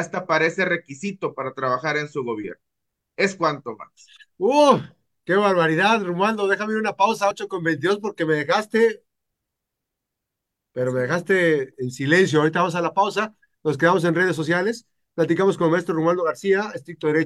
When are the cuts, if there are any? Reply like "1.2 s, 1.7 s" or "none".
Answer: none